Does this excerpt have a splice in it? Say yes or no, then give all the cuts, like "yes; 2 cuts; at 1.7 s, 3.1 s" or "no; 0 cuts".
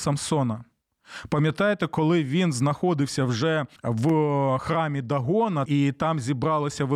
yes; 2 cuts; at 3.8 s, 5.7 s